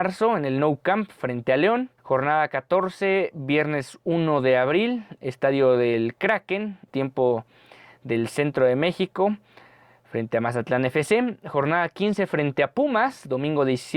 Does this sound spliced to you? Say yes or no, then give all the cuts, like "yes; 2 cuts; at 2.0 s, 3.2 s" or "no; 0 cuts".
yes; 2 cuts; at 2.0 s, 6.9 s